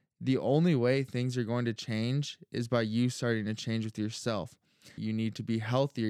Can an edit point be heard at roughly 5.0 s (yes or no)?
yes